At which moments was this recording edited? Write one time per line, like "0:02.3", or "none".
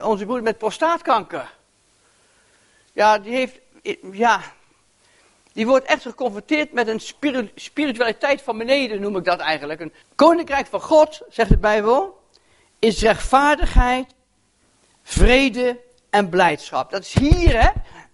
0:10.0